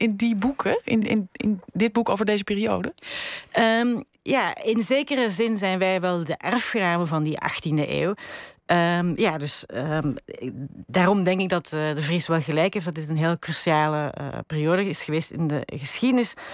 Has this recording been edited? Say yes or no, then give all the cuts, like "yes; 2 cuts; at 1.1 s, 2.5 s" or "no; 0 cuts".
no; 0 cuts